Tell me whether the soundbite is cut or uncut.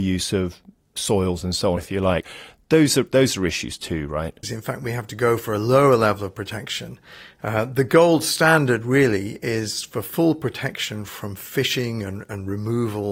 cut